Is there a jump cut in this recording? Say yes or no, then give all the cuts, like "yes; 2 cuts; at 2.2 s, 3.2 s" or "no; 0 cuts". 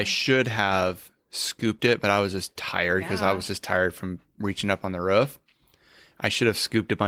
no; 0 cuts